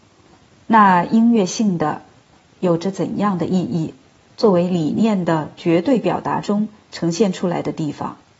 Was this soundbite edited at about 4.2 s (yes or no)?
yes